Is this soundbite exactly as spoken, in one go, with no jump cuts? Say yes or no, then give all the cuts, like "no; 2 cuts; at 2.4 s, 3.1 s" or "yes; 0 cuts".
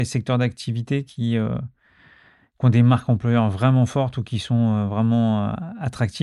yes; 0 cuts